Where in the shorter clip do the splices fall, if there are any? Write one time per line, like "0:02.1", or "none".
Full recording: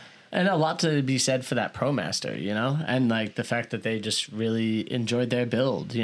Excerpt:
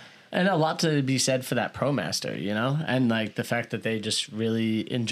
none